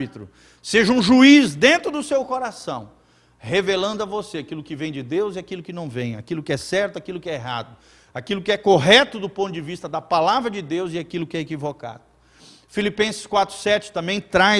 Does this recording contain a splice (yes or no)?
no